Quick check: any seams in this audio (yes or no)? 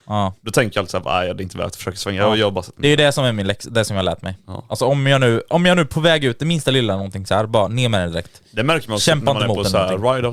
no